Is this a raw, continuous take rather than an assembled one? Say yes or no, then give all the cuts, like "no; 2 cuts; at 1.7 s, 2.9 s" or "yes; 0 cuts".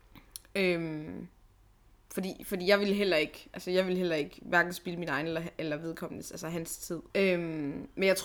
no; 1 cut; at 7.1 s